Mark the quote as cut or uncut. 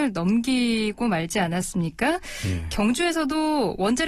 uncut